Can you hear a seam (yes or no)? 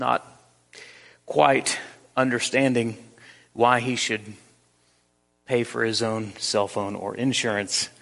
no